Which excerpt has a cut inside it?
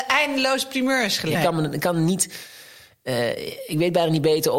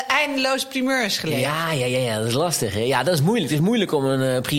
first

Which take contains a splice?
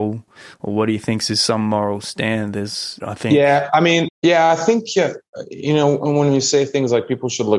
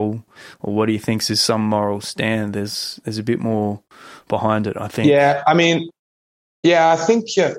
first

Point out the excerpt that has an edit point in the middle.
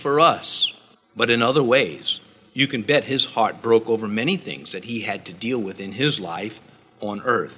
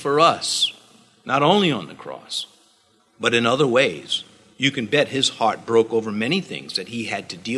first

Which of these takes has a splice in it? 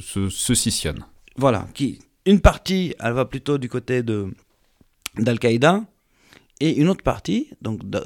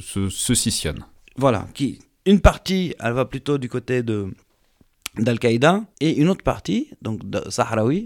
second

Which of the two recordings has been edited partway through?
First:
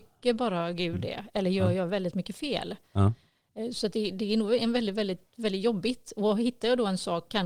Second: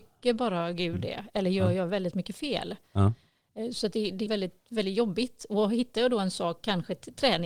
second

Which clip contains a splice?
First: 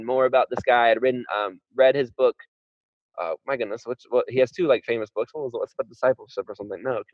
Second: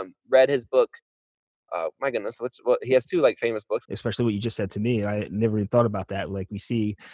second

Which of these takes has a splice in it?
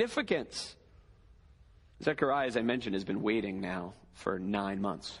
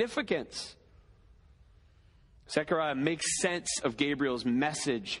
first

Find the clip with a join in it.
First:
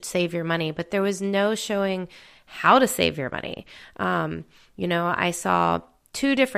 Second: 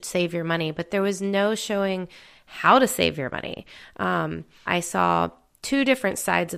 second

